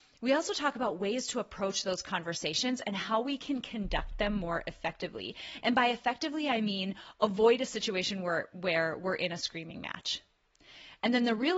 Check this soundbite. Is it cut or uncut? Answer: uncut